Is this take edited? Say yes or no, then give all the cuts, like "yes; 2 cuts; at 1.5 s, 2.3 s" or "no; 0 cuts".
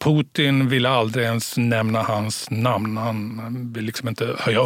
yes; 1 cut; at 3.3 s